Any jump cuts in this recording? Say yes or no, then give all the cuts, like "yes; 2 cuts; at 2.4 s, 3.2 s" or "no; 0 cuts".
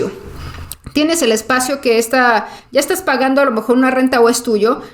yes; 1 cut; at 2.7 s